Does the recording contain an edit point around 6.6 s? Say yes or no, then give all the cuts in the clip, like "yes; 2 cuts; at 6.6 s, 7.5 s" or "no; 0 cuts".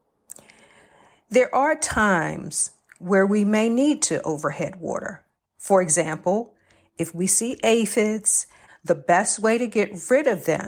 no; 1 cut; at 8.7 s